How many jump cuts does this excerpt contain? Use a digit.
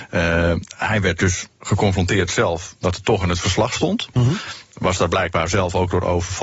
1